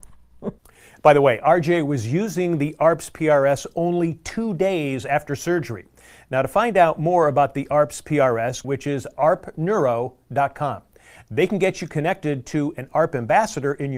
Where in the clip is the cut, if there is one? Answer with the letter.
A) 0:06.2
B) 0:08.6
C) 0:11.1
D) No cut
B